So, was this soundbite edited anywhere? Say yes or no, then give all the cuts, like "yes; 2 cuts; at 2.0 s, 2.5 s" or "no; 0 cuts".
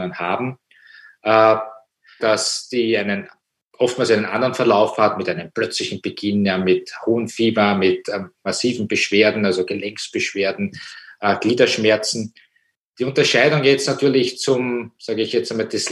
yes; 1 cut; at 2.2 s